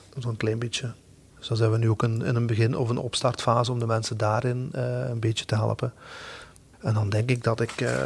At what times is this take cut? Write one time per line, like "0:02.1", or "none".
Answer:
0:01.3
0:06.7